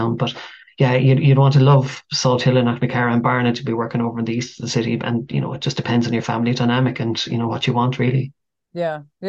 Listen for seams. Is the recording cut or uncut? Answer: uncut